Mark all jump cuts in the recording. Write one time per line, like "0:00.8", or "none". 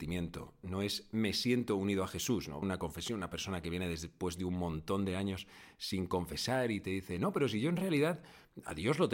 0:02.6